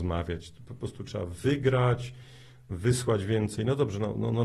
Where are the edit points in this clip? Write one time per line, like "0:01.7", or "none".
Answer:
none